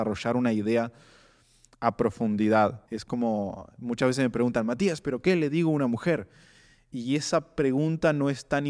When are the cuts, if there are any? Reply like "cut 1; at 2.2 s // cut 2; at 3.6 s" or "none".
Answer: cut 1; at 2.9 s